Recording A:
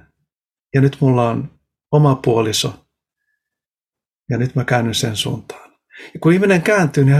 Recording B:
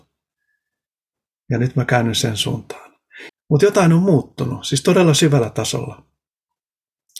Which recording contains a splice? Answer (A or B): B